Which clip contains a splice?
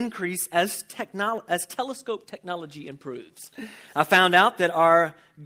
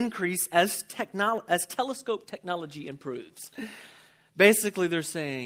first; 1 cut; at 3.9 s

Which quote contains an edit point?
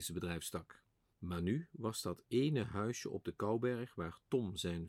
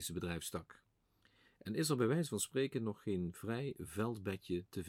first; 1 cut; at 1.1 s

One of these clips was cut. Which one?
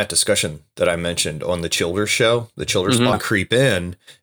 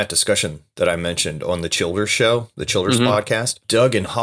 first; 1 cut; at 3.1 s

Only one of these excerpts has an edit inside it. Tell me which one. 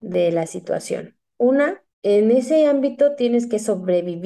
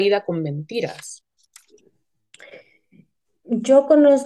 first; 1 cut; at 1.9 s

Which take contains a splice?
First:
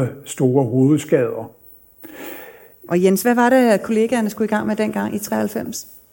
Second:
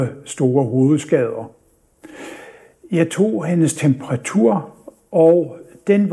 first; 1 cut; at 2.9 s

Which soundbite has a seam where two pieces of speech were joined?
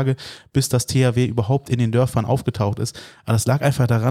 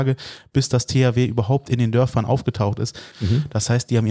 second; 1 cut; at 3.1 s

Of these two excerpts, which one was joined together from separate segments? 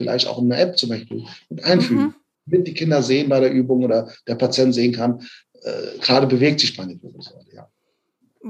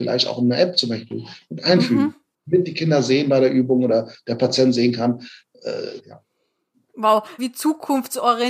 second; 2 cuts; at 6.0 s, 7.4 s

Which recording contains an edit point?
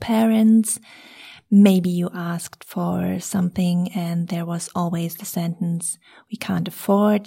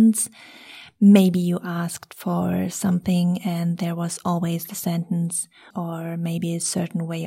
second; 1 cut; at 5.7 s

